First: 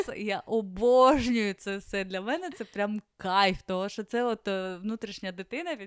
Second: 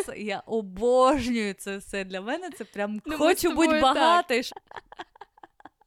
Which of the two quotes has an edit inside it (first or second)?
second